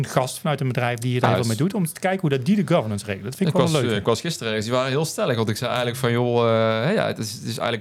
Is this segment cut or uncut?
uncut